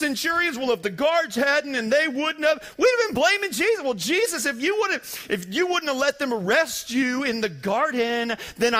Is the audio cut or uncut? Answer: uncut